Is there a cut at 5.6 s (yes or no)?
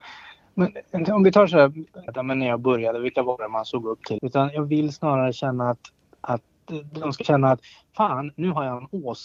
no